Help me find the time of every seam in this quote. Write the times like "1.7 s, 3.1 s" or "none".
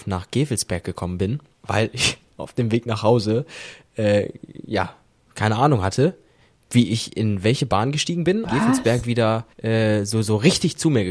8.5 s, 9.5 s